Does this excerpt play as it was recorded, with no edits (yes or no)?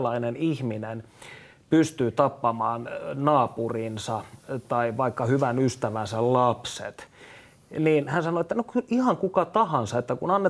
yes